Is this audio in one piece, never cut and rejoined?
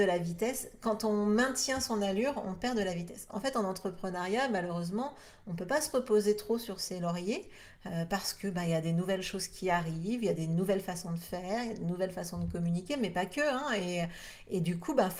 yes; 0 cuts

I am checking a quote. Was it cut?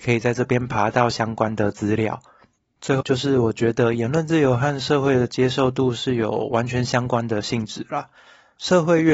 yes; 1 cut; at 3.0 s

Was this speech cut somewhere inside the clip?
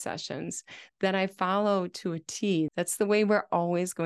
yes; 1 cut; at 2.7 s

